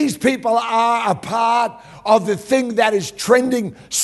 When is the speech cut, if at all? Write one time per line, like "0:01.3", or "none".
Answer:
none